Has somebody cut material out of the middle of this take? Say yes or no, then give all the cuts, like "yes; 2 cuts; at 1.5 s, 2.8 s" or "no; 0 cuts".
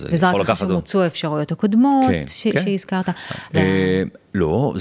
yes; 1 cut; at 3.5 s